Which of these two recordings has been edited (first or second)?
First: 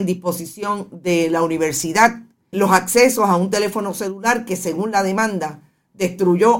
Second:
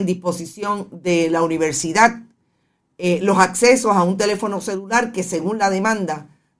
first